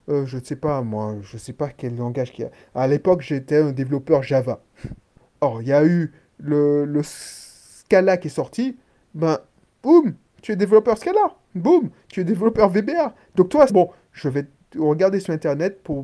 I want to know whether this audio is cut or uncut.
cut